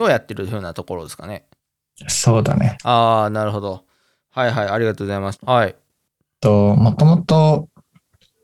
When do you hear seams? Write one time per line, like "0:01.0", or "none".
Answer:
0:05.4